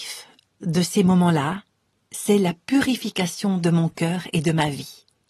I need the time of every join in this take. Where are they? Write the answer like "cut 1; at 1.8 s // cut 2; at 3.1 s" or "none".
none

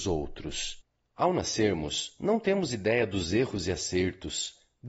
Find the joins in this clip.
cut 1; at 1.0 s

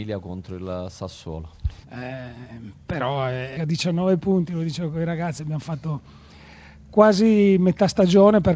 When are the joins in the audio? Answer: cut 1; at 1.8 s // cut 2; at 3.6 s

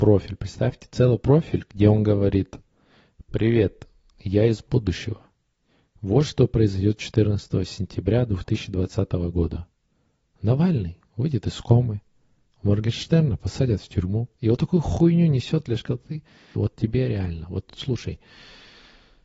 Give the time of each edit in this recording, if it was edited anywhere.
cut 1; at 16.5 s

